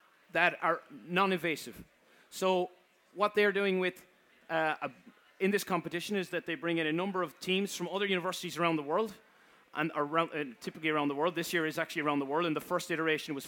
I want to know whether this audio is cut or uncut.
uncut